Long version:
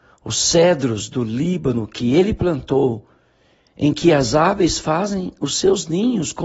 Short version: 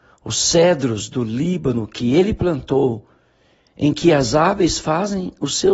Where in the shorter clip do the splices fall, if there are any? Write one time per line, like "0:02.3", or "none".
none

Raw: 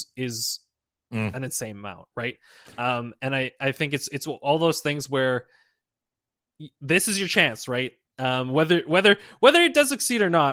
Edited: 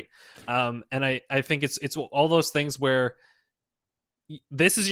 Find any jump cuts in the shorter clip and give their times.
none

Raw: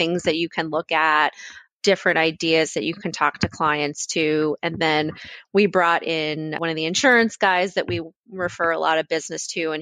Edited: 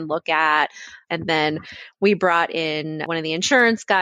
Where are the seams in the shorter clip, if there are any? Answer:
0:01.1

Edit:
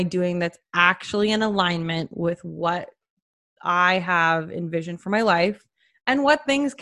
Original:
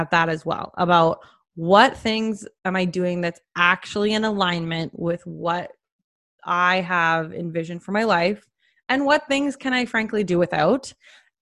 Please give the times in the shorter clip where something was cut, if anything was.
none

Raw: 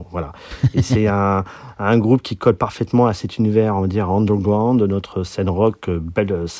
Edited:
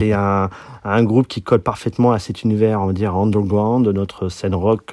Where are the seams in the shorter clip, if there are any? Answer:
none

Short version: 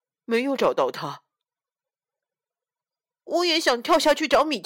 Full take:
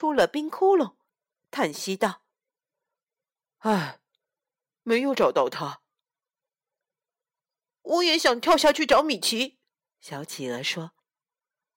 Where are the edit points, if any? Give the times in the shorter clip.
none

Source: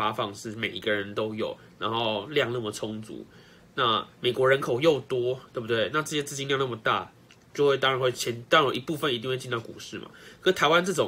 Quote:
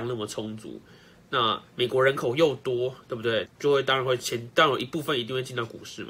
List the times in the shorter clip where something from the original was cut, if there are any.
0:03.4

